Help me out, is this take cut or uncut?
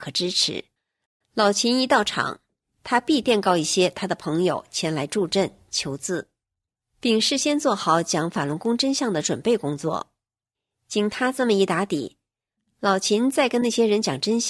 uncut